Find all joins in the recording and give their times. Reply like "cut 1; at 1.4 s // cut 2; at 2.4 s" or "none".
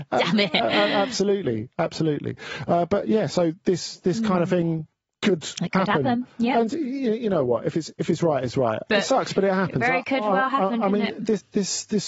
cut 1; at 8.9 s